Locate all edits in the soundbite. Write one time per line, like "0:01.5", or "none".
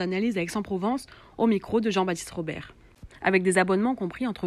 0:03.1